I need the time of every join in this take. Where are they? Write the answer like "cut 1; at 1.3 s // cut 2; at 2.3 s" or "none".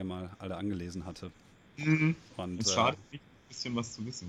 cut 1; at 2.3 s